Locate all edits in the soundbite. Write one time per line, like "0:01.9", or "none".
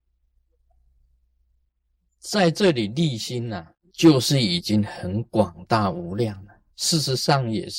0:06.7

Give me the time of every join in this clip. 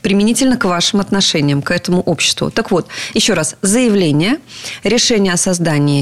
none

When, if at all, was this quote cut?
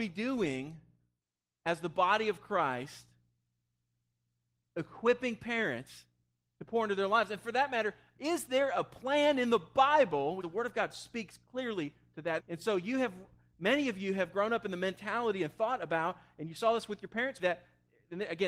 0:10.4
0:12.4
0:17.4

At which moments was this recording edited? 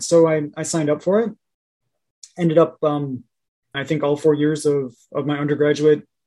0:03.7

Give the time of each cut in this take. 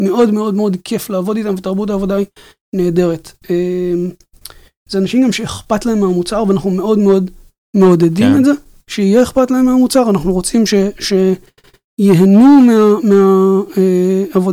none

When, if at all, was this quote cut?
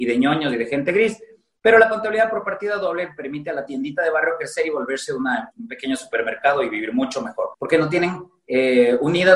0:05.5
0:07.5

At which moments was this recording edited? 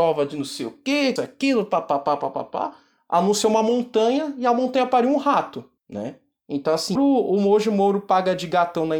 0:01.2
0:05.8
0:07.0

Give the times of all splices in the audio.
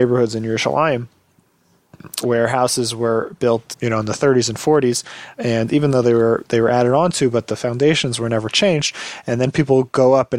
0:02.2
0:03.7
0:05.3

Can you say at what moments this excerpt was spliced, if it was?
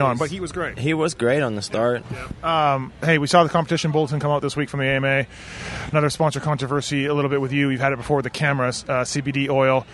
0:02.0

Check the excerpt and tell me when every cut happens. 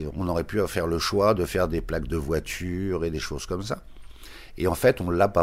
none

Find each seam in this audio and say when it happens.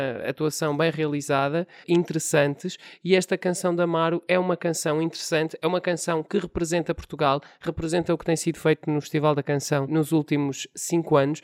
0:01.8
0:09.9

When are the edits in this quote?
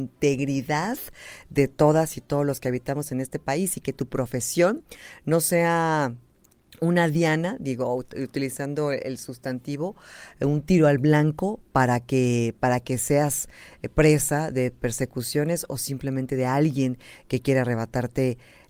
none

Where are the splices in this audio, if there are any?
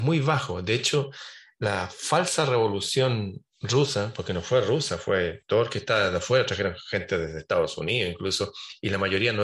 none

